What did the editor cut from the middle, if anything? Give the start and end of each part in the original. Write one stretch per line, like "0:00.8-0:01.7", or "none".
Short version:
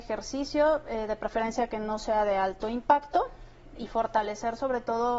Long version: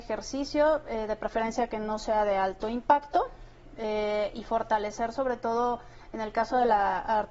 0:03.8-0:04.3